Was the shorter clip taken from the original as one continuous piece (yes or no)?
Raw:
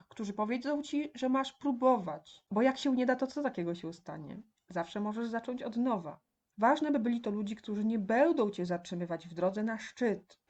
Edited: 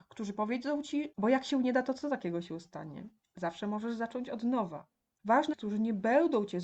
no